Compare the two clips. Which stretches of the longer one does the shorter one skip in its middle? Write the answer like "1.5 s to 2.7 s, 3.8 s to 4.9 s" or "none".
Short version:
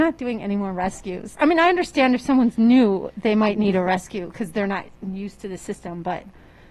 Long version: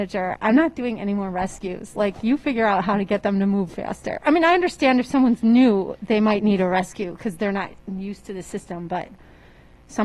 1.9 s to 4.2 s